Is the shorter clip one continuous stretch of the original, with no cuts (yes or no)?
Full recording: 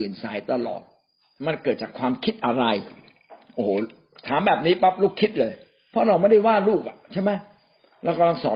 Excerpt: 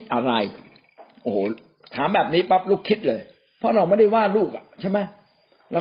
yes